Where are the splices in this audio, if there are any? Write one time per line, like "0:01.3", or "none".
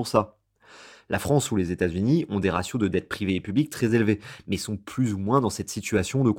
none